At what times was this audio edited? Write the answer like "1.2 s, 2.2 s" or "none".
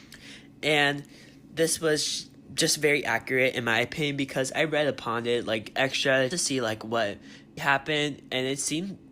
6.3 s, 7.6 s